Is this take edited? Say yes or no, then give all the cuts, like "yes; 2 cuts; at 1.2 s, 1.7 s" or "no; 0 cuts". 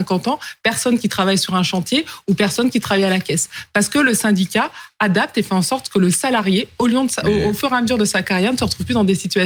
no; 0 cuts